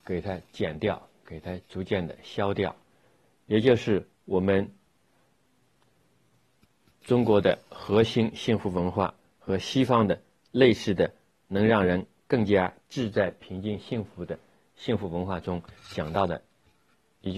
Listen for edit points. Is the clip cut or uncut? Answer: uncut